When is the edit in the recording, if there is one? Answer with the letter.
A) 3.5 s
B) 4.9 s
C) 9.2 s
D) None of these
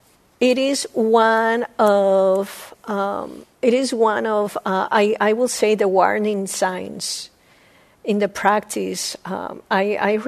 A